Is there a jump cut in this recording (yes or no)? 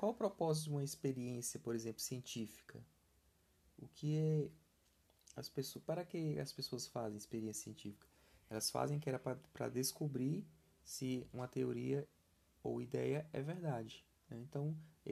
yes